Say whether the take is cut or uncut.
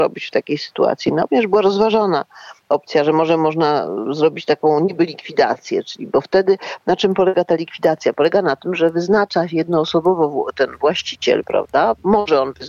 uncut